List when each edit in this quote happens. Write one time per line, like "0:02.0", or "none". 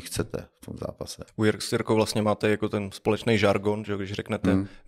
0:01.3